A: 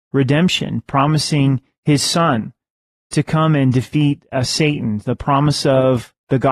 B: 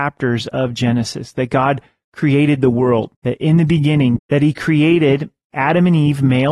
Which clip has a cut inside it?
B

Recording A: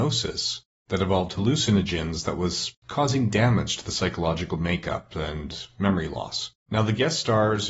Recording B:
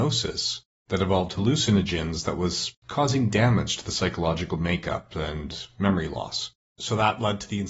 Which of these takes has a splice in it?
A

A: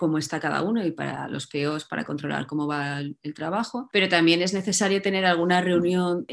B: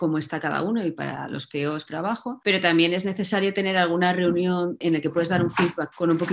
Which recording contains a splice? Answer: B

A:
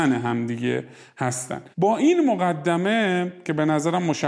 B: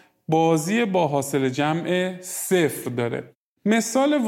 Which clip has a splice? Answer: A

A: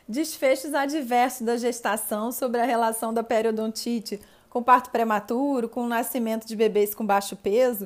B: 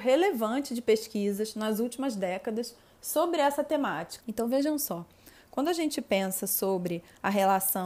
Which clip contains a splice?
B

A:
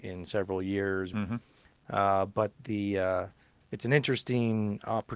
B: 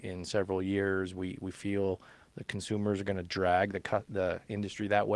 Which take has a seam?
A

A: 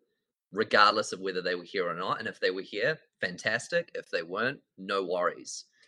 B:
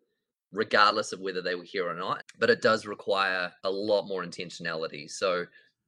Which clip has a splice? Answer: B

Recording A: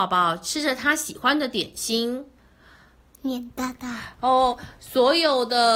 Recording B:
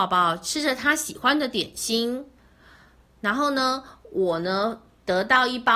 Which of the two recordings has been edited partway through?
A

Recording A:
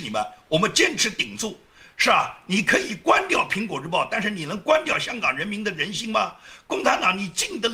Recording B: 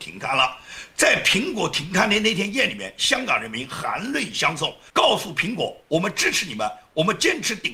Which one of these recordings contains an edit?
B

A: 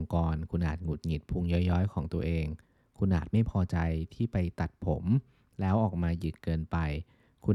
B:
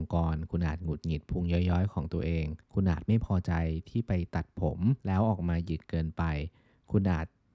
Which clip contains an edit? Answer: B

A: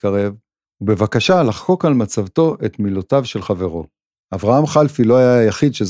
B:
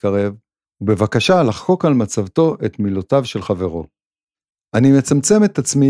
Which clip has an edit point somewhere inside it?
A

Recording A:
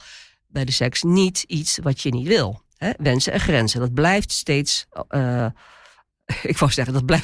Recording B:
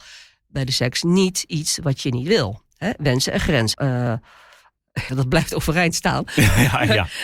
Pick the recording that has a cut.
B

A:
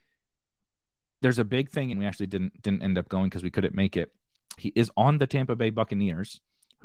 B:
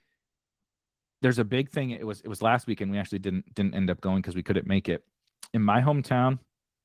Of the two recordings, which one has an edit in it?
A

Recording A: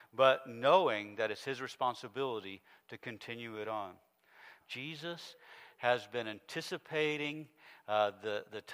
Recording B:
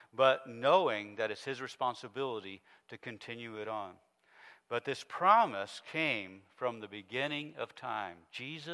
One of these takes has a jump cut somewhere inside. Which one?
A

